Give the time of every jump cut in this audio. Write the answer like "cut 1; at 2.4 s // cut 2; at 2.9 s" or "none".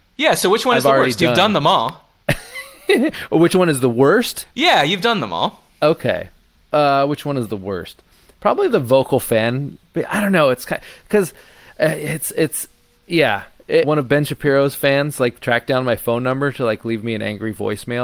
cut 1; at 13.8 s